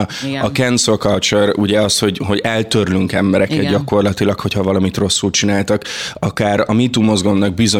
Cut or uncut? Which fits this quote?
uncut